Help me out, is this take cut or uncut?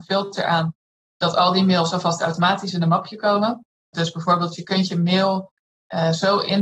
cut